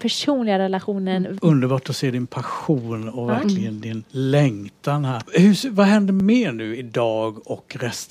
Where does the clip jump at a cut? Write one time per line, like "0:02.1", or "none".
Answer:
0:01.4
0:05.2